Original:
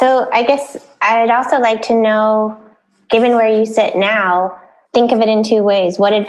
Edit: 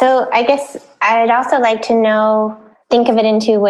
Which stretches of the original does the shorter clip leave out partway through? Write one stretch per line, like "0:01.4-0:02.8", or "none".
0:02.7-0:04.8